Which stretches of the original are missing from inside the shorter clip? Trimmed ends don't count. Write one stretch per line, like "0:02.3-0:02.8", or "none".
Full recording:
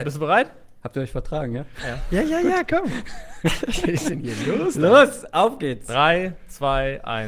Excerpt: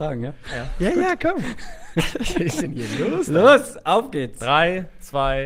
0:02.2-0:02.4